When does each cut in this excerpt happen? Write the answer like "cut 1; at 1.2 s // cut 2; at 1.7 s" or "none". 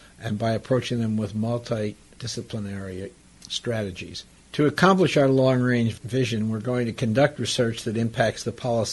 none